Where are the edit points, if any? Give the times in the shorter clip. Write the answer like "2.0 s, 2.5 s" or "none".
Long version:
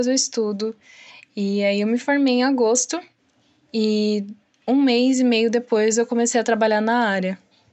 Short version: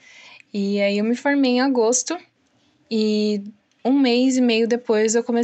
none